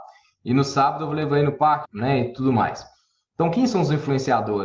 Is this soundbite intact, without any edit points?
no; 1 cut; at 1.8 s

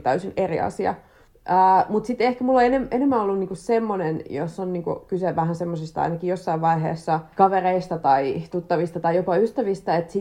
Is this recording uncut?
no; 1 cut; at 1.3 s

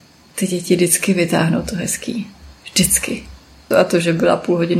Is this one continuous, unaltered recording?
no; 1 cut; at 3.7 s

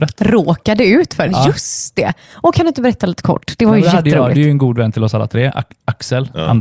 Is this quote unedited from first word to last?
no; 1 cut; at 1.3 s

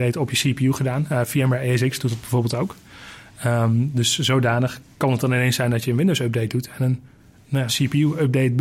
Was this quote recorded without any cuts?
no; 1 cut; at 7.7 s

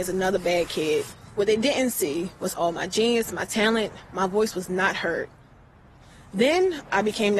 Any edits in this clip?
no; 0 cuts

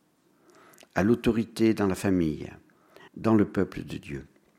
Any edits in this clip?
yes; 1 cut; at 3.1 s

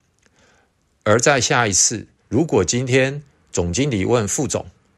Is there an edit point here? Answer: yes; 1 cut; at 2.2 s

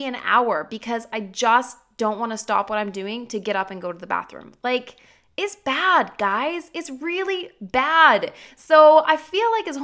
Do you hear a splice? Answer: no; 0 cuts

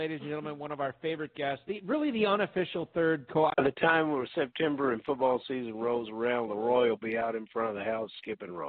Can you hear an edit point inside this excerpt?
yes; 1 cut; at 3.5 s

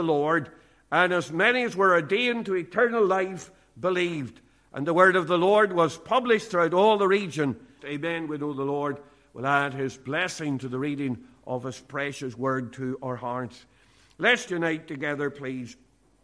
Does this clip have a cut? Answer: yes; 2 cuts; at 7.8 s, 14.5 s

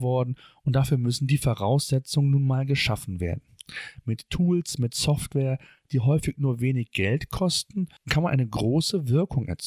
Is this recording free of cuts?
yes; 0 cuts

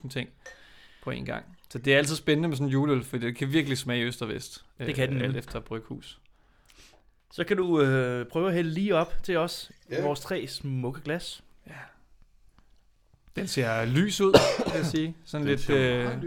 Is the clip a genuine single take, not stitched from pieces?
yes; 0 cuts

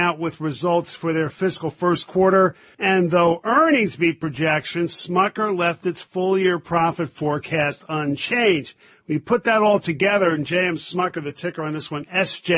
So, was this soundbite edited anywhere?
yes; 1 cut; at 2.7 s

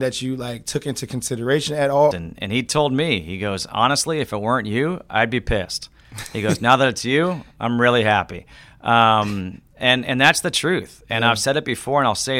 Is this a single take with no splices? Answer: no; 1 cut; at 2.1 s

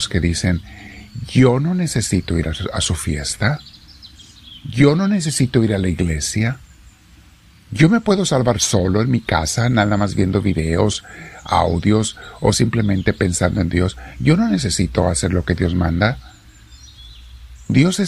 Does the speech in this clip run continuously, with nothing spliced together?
yes; 0 cuts

